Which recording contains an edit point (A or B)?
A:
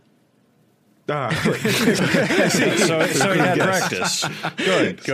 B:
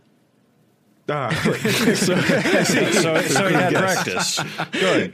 A